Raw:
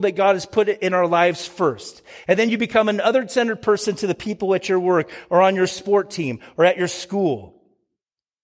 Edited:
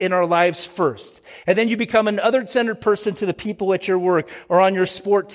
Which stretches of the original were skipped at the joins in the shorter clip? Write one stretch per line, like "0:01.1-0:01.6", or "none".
none